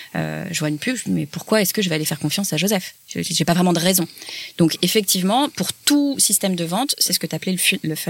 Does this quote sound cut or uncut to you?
uncut